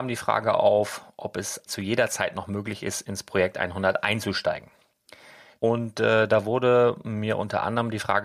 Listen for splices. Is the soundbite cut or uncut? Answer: cut